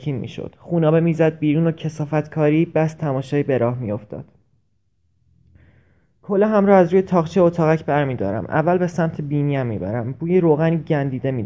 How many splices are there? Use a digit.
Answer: 0